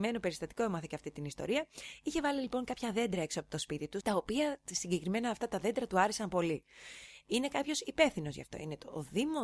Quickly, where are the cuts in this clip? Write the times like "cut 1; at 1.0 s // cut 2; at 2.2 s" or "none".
cut 1; at 4.0 s // cut 2; at 7.2 s